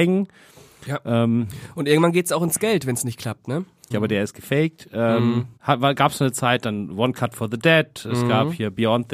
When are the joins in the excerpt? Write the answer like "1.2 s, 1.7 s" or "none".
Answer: 3.9 s, 5.6 s